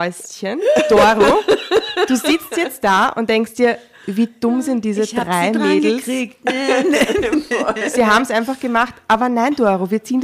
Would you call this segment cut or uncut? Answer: uncut